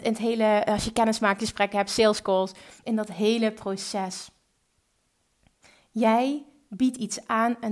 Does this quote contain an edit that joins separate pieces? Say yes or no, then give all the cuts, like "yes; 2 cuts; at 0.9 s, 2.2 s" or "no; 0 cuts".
no; 0 cuts